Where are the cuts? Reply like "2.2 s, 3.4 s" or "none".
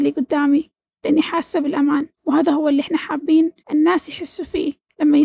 2.2 s, 3.6 s